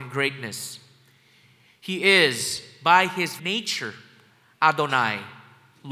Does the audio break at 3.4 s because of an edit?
yes; 1 cut; at 3.4 s

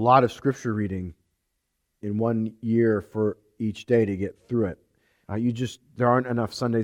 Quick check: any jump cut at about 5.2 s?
yes; 1 cut; at 5.2 s

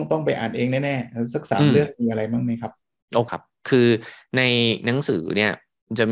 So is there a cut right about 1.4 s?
no; 1 cut; at 3.3 s

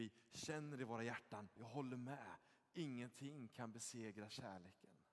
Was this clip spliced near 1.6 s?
yes; 1 cut; at 1.6 s

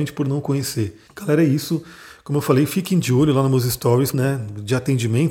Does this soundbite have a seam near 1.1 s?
yes; 2 cuts; at 1.1 s, 4.1 s

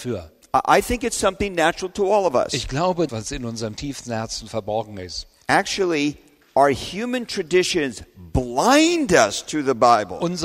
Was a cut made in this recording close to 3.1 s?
yes; 1 cut; at 3.1 s

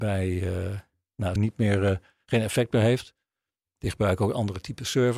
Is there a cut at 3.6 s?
no; 1 cut; at 1.4 s

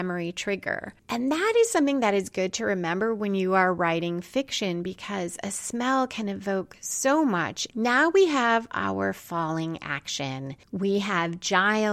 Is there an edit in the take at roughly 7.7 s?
yes; 1 cut; at 7.7 s

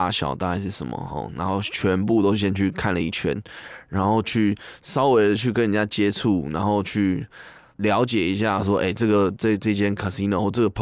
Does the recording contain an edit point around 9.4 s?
no; 0 cuts

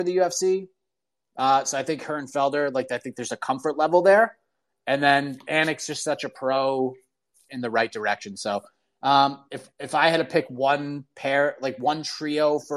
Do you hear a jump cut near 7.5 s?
yes; 1 cut; at 7.5 s

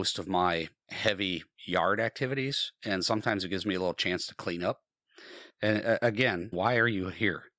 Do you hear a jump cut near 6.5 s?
yes; 2 cuts; at 5.5 s, 6.5 s

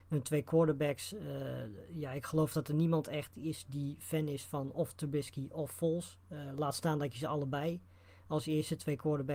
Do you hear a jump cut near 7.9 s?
no; 0 cuts

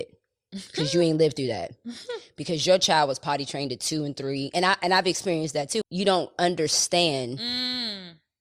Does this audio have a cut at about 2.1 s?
no; 1 cut; at 5.8 s

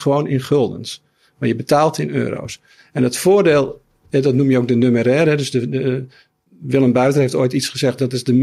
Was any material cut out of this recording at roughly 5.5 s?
no; 0 cuts

